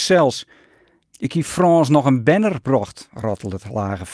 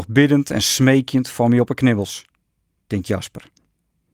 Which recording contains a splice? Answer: first; 1 cut; at 1.0 s

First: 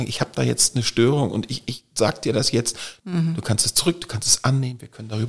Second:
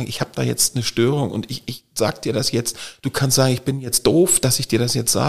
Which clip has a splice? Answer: first; 1 cut; at 3.0 s

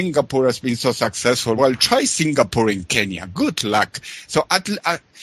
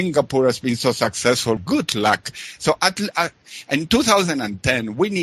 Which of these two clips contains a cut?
second; 1 cut; at 1.6 s

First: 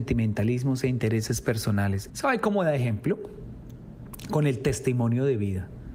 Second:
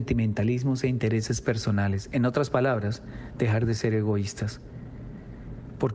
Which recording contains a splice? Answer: first; 1 cut; at 2.1 s

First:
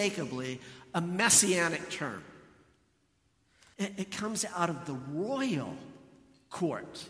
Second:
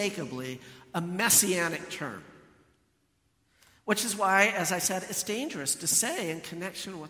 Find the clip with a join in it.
first; 1 cut; at 3.7 s

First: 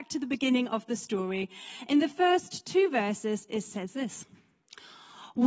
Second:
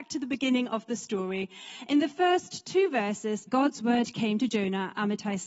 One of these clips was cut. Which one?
second; 1 cut; at 3.5 s

